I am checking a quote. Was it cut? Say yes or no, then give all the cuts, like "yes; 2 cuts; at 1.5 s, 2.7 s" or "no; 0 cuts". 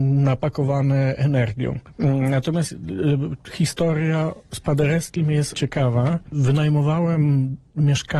no; 0 cuts